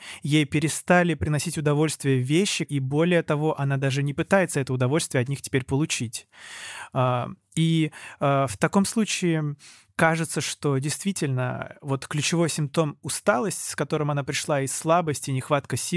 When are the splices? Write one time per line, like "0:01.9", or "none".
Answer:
0:02.6

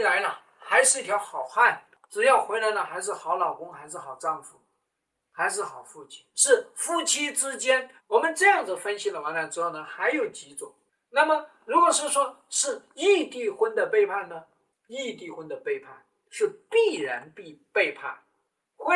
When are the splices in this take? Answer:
0:06.3
0:08.0

